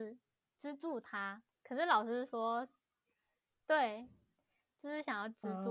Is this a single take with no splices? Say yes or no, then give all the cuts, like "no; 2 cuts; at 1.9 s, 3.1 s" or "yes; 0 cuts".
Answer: yes; 0 cuts